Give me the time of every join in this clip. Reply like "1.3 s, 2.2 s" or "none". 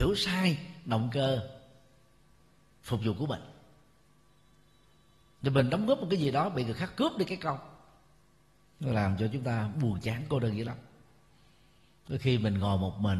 none